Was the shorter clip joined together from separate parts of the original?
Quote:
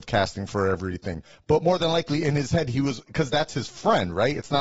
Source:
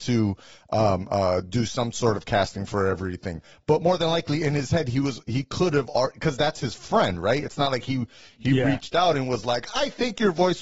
yes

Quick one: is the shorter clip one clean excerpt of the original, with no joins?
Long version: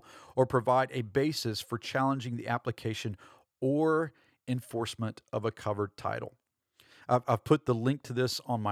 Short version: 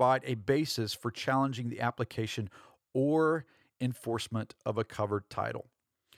yes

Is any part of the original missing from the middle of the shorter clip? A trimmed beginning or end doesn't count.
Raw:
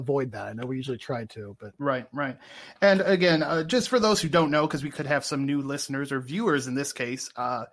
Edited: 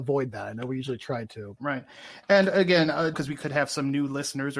yes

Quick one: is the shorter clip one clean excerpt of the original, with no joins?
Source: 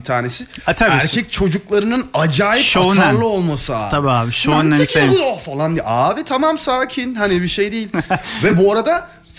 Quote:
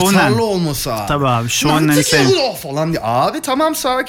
yes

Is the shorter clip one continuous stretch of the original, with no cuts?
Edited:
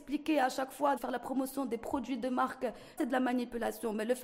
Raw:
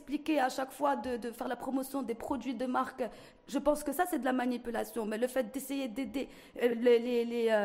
no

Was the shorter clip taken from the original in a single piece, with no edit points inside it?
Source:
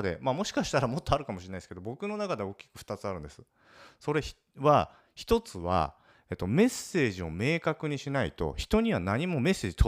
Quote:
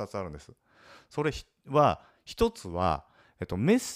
yes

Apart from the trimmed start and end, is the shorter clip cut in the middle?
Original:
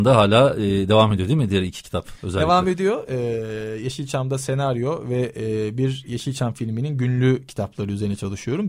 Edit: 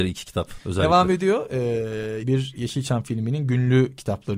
yes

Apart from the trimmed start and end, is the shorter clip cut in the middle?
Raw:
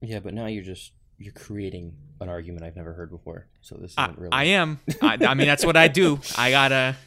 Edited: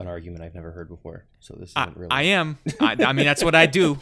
no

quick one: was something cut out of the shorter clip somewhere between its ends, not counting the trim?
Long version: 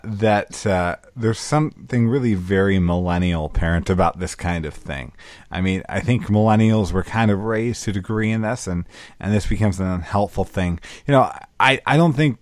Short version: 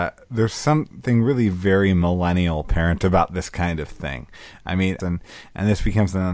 yes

